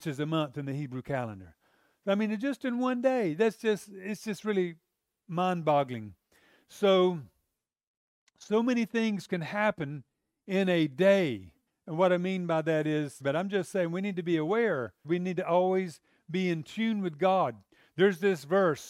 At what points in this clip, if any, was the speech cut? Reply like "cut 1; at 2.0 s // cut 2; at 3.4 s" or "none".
cut 1; at 11.7 s // cut 2; at 13.2 s // cut 3; at 15.0 s

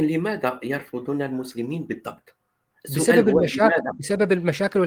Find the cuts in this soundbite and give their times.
cut 1; at 2.7 s

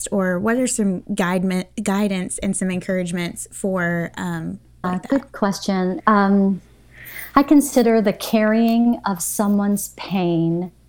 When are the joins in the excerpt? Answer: cut 1; at 4.8 s // cut 2; at 6.0 s

